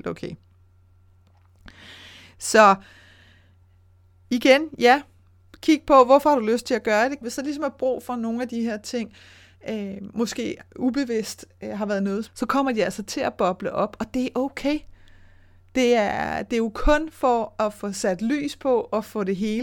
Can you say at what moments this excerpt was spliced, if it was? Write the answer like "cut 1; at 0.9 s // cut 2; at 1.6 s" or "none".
cut 1; at 7.2 s // cut 2; at 12.3 s